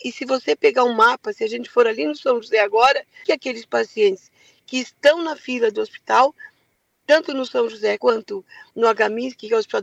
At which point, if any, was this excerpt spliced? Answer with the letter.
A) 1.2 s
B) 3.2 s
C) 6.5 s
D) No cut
B